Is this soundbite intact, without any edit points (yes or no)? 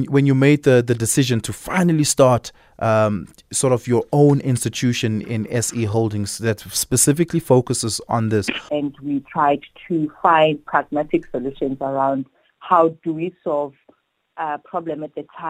no